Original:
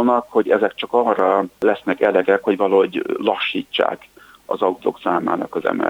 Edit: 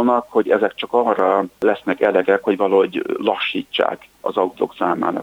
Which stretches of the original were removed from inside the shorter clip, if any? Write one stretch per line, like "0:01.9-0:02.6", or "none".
0:04.1-0:04.4